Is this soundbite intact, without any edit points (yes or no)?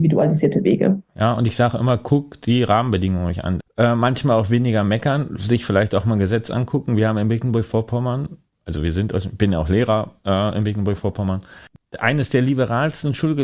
no